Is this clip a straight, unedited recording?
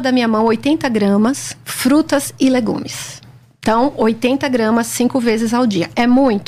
no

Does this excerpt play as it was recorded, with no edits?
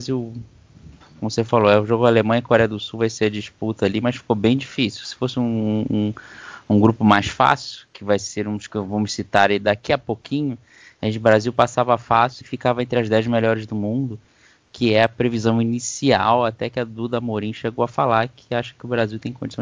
no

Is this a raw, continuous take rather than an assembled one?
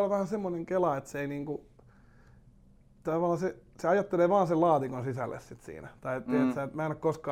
yes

